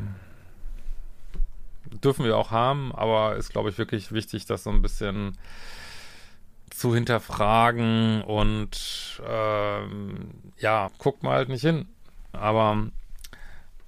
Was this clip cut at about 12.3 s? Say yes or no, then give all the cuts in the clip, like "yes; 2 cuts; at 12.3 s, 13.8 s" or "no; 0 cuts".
yes; 2 cuts; at 10.9 s, 12.3 s